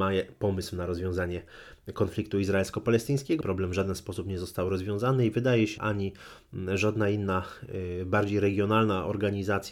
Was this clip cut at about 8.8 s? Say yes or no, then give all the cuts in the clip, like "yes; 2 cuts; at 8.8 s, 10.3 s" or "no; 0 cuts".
no; 2 cuts; at 3.4 s, 5.8 s